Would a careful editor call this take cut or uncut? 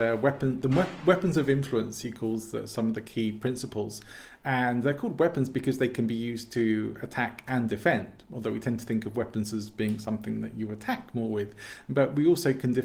uncut